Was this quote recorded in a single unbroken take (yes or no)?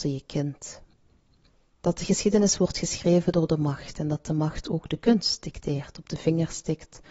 no